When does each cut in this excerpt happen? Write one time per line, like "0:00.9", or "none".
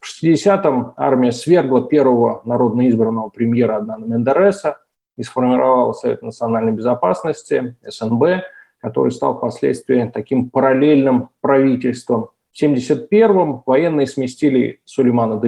none